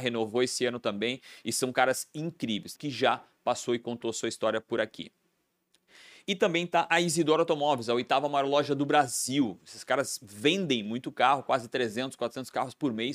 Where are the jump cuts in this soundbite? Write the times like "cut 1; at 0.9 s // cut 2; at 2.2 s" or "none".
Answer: cut 1; at 2.7 s